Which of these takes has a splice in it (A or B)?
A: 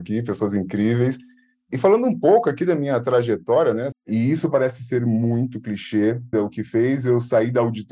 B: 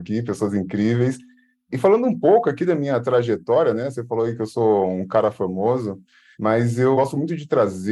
A